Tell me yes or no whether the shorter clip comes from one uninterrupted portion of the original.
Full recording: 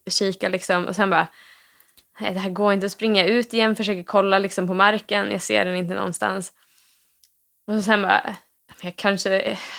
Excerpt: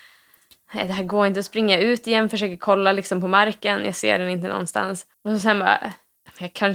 no